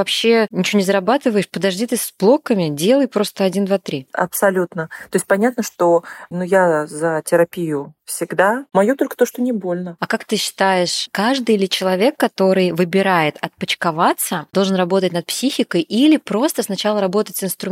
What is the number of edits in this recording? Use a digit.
1